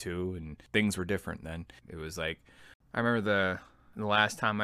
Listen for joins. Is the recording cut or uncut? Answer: cut